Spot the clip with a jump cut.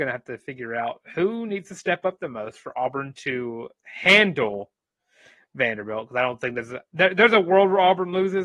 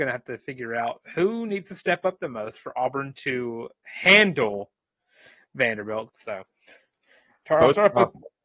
second; 1 cut; at 6.1 s

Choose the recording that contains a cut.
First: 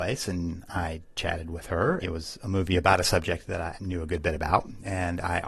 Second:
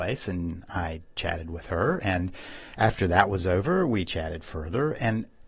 first; 2 cuts; at 2.0 s, 3.7 s

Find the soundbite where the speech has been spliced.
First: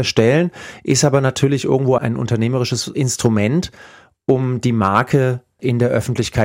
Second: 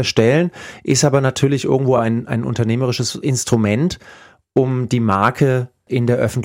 first; 1 cut; at 2.0 s

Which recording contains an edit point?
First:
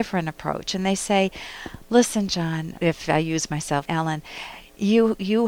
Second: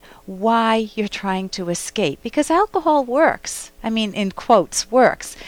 first; 2 cuts; at 2.8 s, 3.9 s

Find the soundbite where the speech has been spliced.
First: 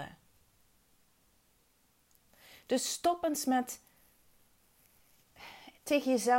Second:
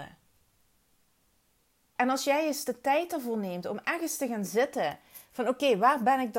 second; 1 cut; at 2.0 s

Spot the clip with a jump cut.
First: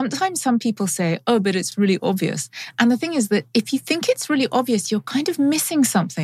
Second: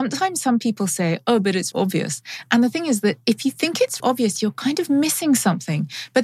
second; 2 cuts; at 1.7 s, 4.0 s

